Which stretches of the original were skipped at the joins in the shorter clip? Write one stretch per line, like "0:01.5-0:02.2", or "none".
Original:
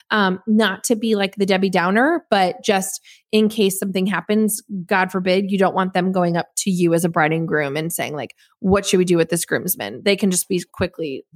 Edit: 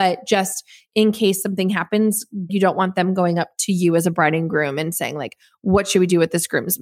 0:04.9-0:05.5